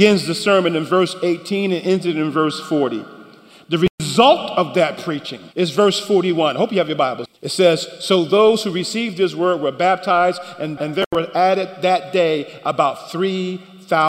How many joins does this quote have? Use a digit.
3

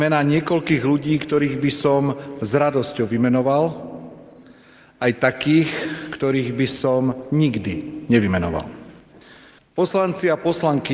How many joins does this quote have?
1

